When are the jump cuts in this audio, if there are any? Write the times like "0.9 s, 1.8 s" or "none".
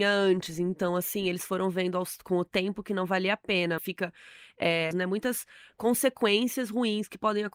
3.8 s, 4.9 s